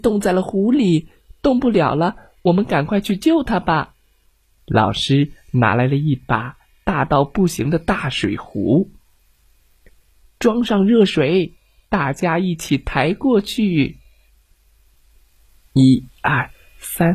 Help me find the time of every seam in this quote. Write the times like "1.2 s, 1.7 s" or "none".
4.6 s